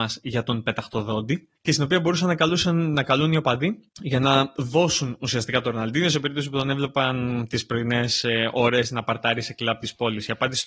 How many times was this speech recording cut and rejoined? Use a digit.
2